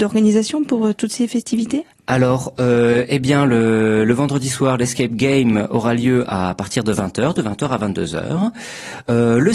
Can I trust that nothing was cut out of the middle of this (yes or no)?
yes